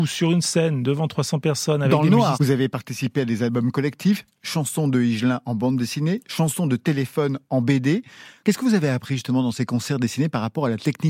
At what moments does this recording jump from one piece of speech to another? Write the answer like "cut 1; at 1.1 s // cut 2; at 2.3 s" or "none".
cut 1; at 2.3 s // cut 2; at 8.4 s